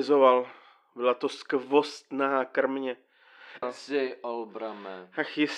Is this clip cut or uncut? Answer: cut